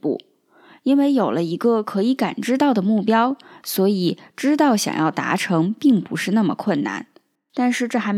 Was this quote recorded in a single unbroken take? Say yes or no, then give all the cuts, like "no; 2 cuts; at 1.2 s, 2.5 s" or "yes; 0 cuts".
yes; 0 cuts